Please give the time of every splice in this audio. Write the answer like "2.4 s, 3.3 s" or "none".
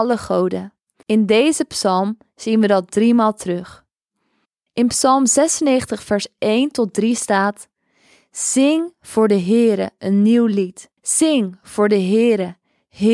1.0 s, 11.0 s